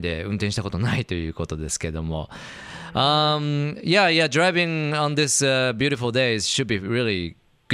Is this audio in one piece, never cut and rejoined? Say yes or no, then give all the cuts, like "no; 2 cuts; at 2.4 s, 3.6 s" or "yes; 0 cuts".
yes; 0 cuts